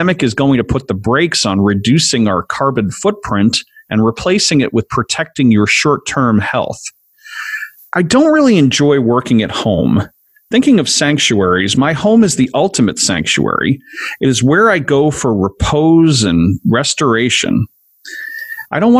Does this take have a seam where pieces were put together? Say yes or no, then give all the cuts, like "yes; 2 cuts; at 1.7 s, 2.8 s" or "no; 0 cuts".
yes; 1 cut; at 7.8 s